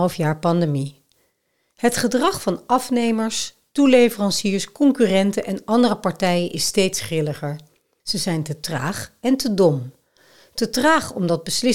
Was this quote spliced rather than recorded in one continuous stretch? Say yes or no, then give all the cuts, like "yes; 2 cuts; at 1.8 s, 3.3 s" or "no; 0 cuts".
yes; 1 cut; at 8.0 s